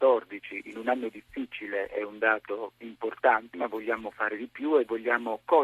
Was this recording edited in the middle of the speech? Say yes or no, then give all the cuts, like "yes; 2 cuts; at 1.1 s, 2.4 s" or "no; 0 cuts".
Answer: yes; 1 cut; at 3.5 s